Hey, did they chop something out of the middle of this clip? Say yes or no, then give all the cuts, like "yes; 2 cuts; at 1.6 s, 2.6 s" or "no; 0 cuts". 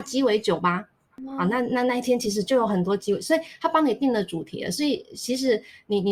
no; 0 cuts